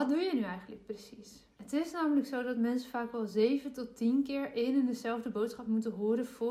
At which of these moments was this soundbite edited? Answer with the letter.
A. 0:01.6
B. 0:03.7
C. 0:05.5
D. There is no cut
A